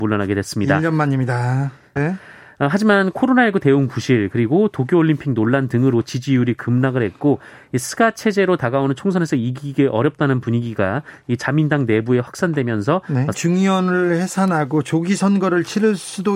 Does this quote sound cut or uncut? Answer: cut